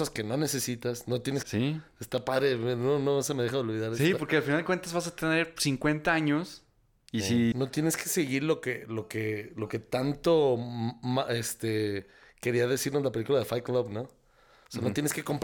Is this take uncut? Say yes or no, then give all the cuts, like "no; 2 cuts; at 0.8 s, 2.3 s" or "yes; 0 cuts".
no; 2 cuts; at 1.4 s, 7.5 s